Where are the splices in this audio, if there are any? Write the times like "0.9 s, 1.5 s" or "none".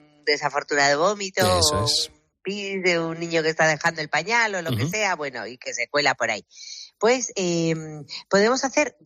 none